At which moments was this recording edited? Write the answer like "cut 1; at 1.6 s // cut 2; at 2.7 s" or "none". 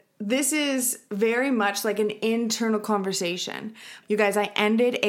cut 1; at 4.0 s